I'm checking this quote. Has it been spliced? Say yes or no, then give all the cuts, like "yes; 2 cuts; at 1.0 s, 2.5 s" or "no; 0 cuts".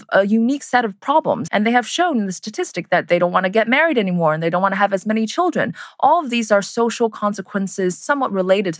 yes; 1 cut; at 1.5 s